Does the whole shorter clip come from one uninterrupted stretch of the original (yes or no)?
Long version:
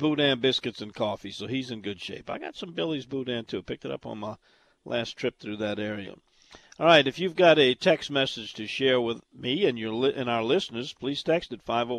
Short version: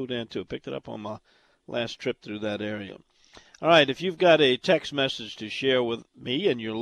yes